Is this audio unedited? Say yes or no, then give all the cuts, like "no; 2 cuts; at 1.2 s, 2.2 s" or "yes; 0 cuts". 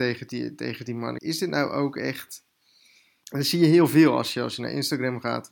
no; 2 cuts; at 1.2 s, 3.2 s